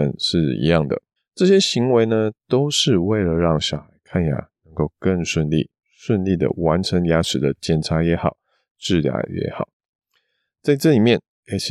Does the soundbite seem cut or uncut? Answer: cut